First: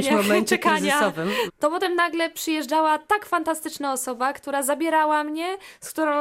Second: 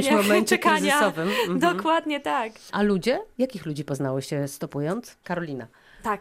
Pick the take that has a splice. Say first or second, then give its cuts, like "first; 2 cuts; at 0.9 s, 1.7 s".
first; 1 cut; at 1.5 s